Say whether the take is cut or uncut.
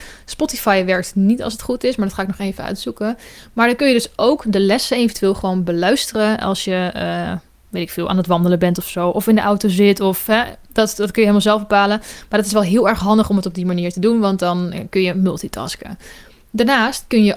uncut